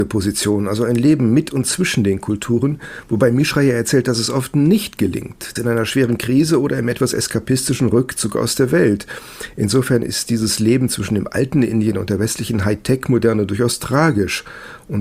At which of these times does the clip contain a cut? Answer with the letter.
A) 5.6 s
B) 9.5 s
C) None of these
A